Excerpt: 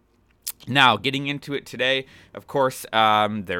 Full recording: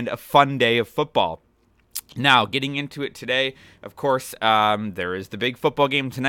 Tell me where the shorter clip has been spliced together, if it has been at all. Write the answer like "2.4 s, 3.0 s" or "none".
none